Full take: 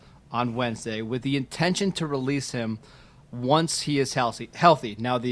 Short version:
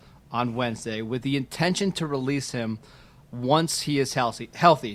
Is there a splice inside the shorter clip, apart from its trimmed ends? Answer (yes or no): no